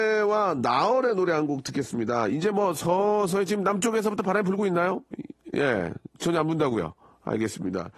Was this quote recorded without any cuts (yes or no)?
yes